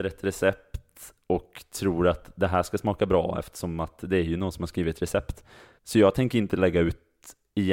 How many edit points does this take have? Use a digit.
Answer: 1